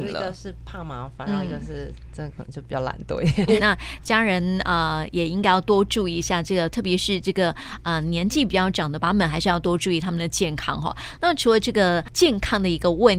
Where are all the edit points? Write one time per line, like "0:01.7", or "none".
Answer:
0:03.6
0:09.0